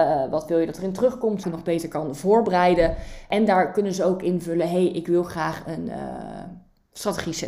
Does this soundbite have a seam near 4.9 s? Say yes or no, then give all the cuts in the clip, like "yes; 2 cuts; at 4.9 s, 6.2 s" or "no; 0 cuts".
no; 1 cut; at 1.4 s